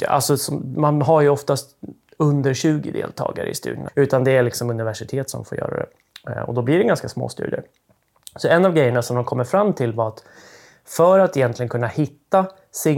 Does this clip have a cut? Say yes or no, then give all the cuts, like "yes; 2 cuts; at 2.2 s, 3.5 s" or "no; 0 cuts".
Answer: yes; 1 cut; at 3.9 s